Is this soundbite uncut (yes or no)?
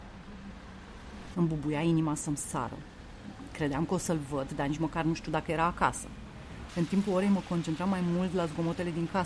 no